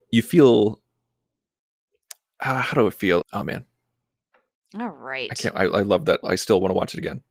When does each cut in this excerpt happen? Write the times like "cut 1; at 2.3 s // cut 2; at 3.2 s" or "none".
cut 1; at 3.2 s // cut 2; at 6.2 s